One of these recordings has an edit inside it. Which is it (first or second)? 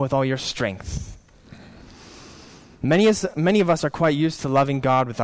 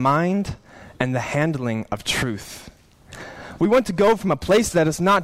second